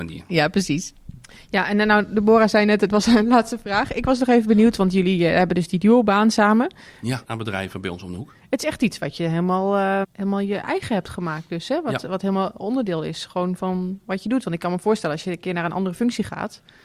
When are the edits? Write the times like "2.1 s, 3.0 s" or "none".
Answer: 7.2 s, 10.0 s